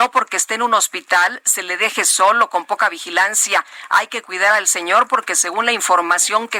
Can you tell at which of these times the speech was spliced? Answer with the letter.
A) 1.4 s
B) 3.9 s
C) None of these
C